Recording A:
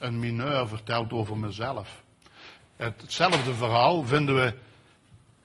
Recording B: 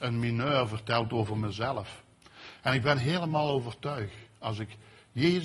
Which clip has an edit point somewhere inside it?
A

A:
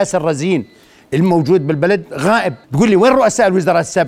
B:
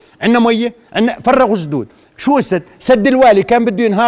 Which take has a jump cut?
A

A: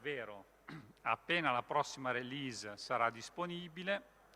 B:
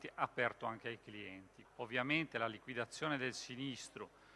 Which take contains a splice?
B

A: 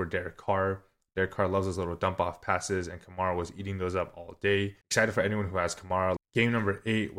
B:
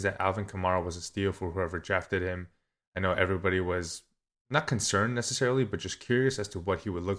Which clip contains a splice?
A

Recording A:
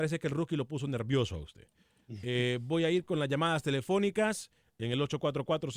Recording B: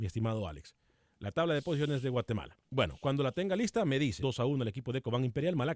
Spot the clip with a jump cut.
B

